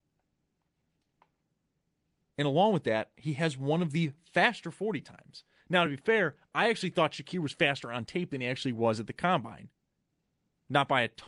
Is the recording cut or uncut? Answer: uncut